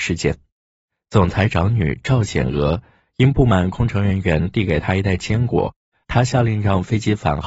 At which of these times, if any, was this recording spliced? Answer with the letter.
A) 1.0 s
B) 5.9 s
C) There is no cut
B